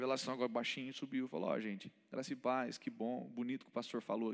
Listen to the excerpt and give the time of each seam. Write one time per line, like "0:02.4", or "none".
none